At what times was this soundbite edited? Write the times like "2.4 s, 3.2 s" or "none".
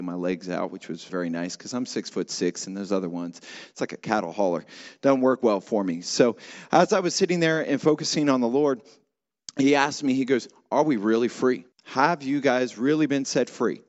1.1 s, 11.7 s